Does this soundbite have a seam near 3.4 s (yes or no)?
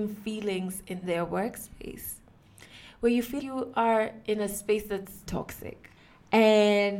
yes